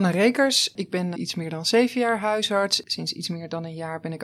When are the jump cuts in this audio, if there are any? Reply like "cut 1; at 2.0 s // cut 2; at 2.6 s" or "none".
cut 1; at 1.1 s